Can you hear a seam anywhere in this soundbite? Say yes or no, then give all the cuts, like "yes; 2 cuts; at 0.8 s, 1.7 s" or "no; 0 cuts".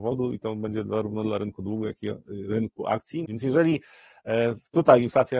yes; 1 cut; at 3.2 s